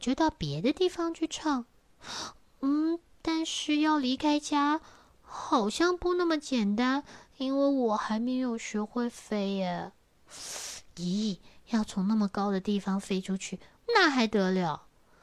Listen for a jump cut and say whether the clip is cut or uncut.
cut